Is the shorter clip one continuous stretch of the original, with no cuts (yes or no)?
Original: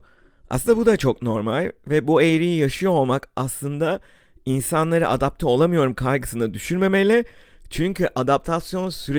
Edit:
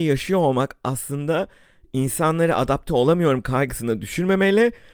yes